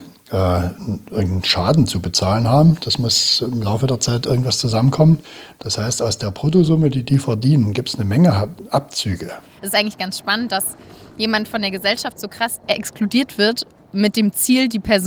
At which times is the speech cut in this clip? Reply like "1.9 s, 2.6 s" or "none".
none